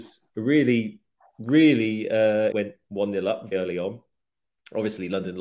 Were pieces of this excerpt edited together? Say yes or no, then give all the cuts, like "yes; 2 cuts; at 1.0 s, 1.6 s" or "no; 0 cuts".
yes; 2 cuts; at 2.5 s, 3.5 s